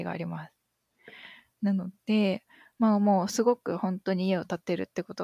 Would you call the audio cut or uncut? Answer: uncut